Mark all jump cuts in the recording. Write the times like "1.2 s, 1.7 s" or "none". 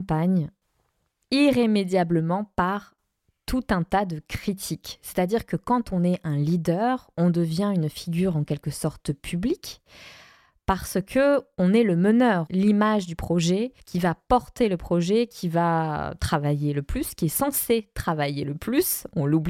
12.5 s, 13.8 s